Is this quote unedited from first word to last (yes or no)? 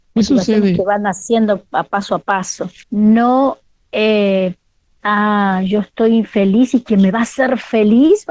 no